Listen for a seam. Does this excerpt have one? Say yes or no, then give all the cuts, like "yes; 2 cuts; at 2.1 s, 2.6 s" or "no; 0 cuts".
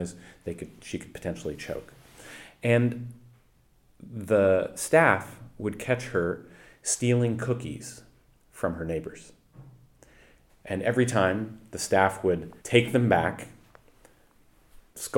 yes; 2 cuts; at 10.5 s, 12.6 s